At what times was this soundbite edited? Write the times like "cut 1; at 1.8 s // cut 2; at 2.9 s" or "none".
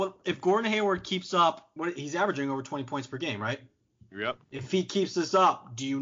cut 1; at 1.8 s // cut 2; at 4.4 s